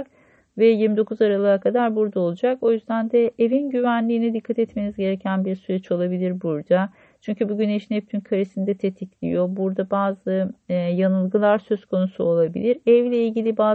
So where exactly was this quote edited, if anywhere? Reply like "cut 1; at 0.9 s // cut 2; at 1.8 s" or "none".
none